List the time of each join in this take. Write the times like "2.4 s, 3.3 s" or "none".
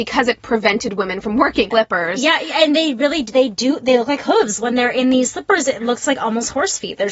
1.7 s